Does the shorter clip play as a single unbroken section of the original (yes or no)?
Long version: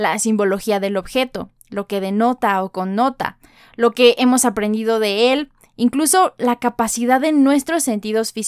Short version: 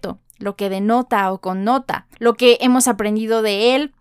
no